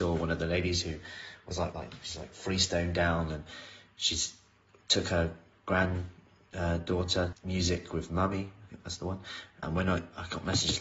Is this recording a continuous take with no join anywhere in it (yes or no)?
no